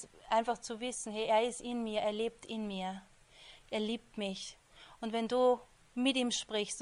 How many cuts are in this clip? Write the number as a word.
zero